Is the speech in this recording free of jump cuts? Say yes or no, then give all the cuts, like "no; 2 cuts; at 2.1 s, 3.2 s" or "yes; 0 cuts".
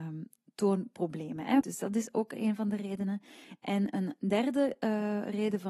no; 1 cut; at 1.6 s